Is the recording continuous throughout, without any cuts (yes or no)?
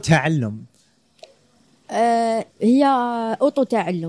no